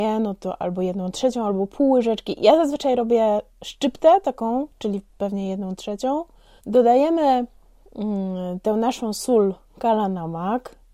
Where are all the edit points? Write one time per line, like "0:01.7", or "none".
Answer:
0:06.6